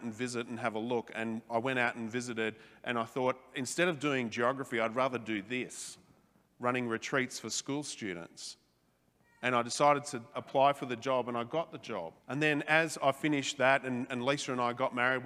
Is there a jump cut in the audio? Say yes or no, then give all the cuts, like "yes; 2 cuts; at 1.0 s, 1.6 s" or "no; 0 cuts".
yes; 2 cuts; at 10.3 s, 12.2 s